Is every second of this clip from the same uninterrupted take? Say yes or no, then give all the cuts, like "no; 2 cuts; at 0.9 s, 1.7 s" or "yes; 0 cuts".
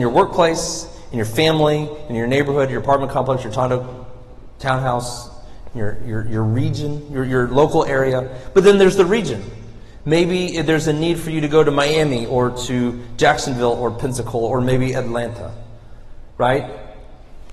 yes; 0 cuts